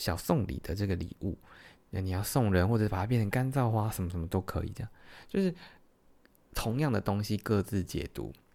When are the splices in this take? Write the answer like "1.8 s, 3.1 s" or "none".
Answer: none